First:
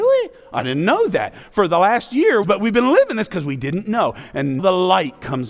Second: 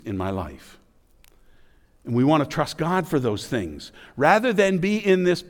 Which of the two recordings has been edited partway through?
first; 2 cuts; at 2.4 s, 4.6 s

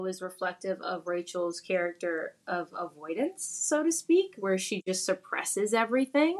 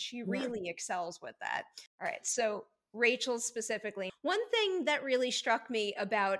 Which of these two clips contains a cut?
second; 2 cuts; at 1.9 s, 4.1 s

